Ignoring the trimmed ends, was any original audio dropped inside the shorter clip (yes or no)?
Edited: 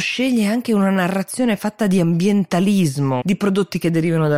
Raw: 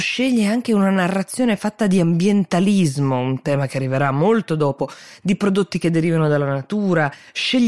yes